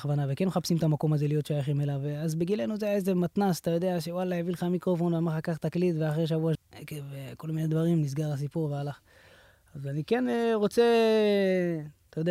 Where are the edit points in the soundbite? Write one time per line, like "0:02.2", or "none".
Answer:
0:06.6